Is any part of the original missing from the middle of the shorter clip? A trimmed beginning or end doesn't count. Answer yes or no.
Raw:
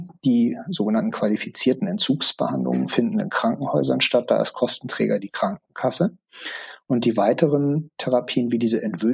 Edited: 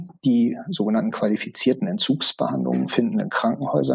no